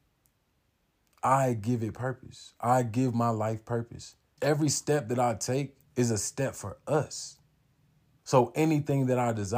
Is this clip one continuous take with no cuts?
no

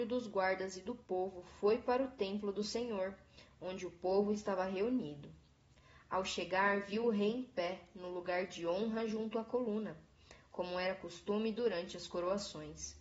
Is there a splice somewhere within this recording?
no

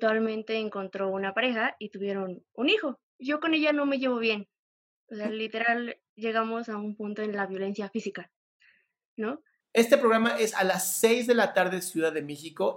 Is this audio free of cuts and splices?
no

